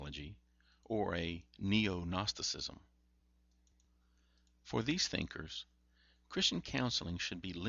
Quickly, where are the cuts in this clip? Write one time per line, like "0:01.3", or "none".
none